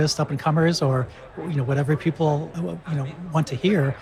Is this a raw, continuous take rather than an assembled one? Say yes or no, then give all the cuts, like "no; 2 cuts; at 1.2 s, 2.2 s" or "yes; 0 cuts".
no; 1 cut; at 2.5 s